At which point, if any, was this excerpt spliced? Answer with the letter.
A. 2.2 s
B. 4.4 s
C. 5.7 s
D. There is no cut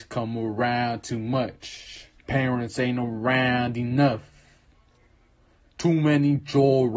A